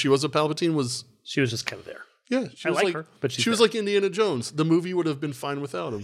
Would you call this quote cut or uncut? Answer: uncut